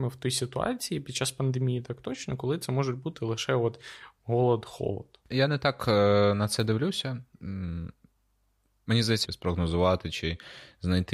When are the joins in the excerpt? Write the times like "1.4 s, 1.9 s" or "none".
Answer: 5.3 s, 9.2 s